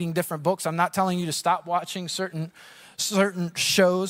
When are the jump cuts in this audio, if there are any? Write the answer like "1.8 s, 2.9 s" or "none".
none